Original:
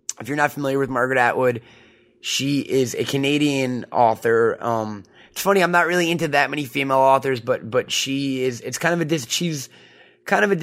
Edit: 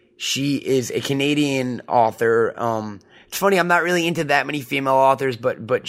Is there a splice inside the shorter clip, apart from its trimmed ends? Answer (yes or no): no